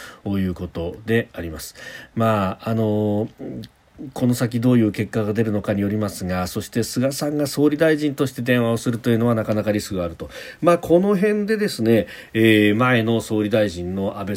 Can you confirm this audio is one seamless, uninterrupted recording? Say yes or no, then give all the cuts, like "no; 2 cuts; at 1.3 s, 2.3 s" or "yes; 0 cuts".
yes; 0 cuts